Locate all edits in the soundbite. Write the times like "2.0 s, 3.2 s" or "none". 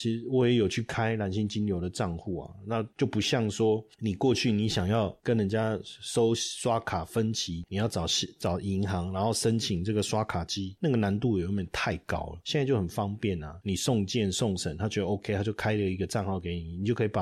7.6 s